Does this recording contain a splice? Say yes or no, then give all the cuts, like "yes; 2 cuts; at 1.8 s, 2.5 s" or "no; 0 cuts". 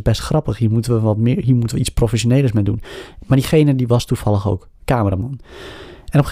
no; 0 cuts